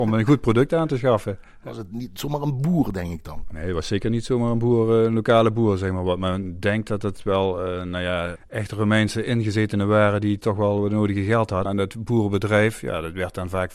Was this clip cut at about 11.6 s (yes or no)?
yes